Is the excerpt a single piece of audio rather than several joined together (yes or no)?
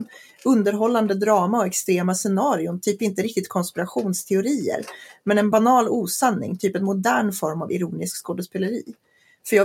yes